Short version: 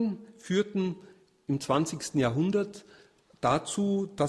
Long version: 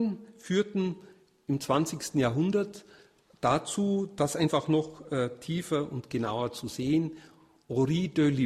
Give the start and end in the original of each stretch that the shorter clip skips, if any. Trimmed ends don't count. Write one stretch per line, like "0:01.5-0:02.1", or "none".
none